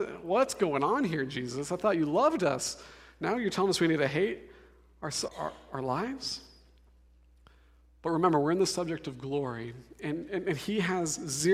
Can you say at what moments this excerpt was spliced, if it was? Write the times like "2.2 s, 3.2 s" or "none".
5.3 s

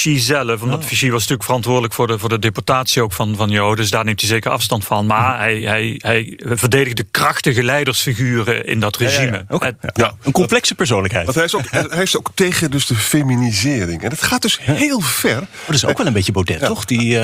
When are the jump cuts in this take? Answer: none

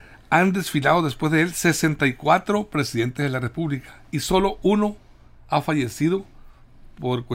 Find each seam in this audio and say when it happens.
none

